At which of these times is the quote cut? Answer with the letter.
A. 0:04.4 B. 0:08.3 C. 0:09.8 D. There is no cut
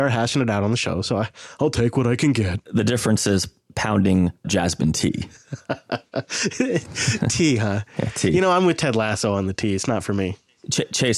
A